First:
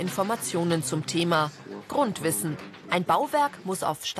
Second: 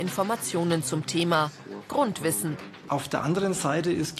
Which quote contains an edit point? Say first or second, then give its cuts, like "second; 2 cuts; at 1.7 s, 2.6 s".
second; 1 cut; at 2.9 s